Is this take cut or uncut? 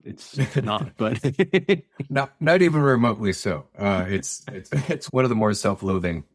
uncut